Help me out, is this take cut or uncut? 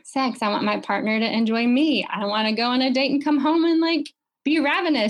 cut